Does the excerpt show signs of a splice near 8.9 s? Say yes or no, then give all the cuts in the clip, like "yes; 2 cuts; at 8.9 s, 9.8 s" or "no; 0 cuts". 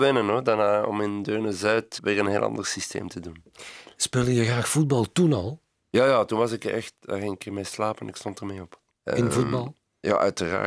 yes; 3 cuts; at 2.0 s, 7.0 s, 8.9 s